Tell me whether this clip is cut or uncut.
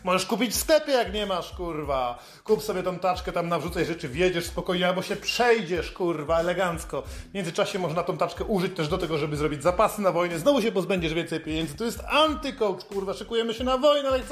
uncut